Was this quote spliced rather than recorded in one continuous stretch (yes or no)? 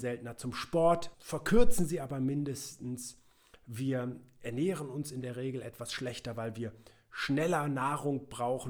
yes